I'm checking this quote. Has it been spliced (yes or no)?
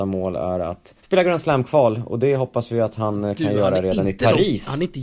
yes